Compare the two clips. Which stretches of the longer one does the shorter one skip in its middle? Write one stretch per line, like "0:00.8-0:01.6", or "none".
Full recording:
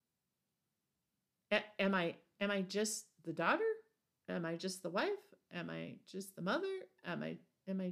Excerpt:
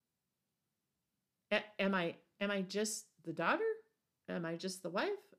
none